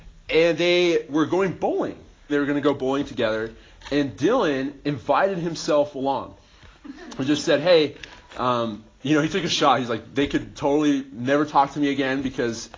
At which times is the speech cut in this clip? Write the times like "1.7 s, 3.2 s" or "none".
2.3 s